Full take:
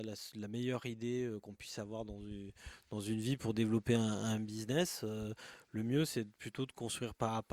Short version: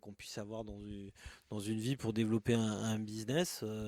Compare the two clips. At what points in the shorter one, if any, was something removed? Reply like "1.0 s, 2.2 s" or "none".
none